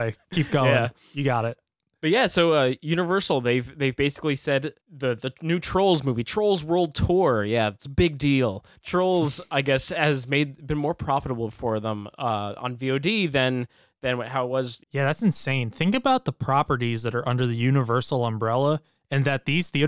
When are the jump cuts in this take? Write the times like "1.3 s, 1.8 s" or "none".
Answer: 14.8 s